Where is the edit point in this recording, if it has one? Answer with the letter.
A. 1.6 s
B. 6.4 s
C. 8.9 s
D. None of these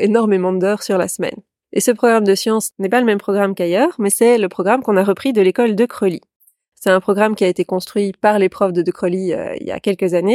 A